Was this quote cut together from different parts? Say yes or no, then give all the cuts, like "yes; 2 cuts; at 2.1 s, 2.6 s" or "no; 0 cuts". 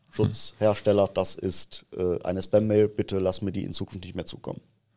no; 0 cuts